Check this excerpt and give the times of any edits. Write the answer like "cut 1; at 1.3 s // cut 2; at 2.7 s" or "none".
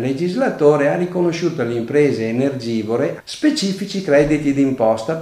cut 1; at 3.2 s